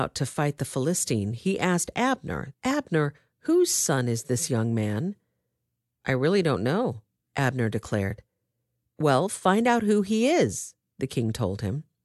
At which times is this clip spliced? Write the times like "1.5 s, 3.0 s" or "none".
2.5 s

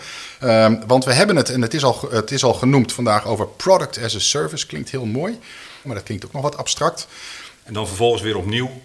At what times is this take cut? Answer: 5.8 s, 7.6 s

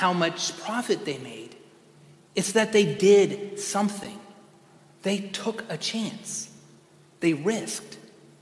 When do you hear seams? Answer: none

